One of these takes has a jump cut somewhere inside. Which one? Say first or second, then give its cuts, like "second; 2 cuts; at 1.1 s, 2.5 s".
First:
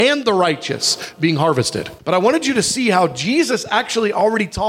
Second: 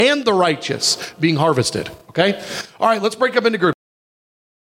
first; 1 cut; at 2.0 s